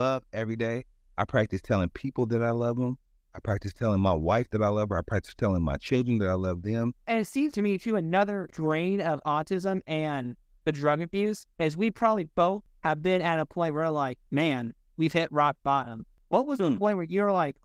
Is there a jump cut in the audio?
yes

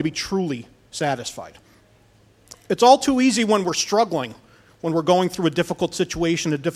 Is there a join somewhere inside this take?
no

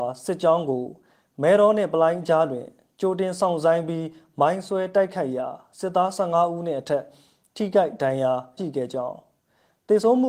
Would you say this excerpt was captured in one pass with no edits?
no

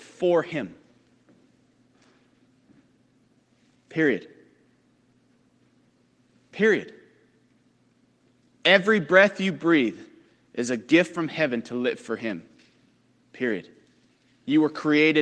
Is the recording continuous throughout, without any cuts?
yes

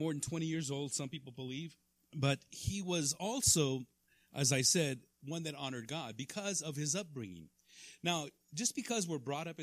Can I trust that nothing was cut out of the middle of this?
yes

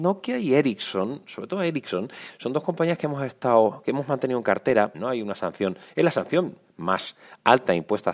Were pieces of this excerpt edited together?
yes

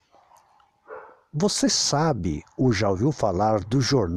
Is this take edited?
no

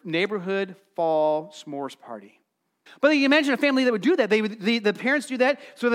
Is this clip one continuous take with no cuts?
no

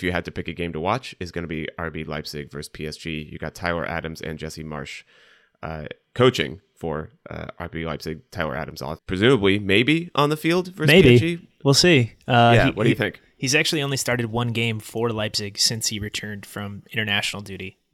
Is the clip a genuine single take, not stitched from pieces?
no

